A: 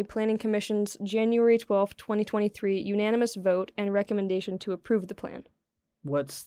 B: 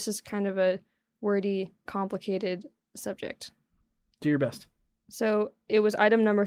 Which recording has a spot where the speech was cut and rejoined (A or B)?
B